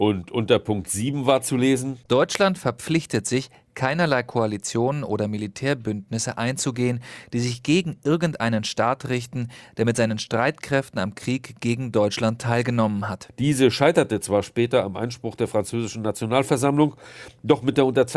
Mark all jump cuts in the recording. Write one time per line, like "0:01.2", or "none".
0:13.3